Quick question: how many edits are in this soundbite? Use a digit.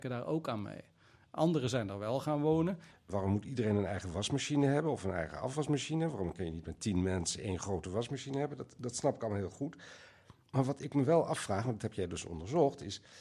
1